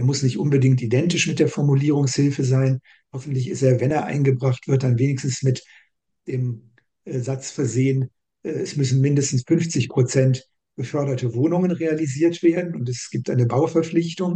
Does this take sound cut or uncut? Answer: uncut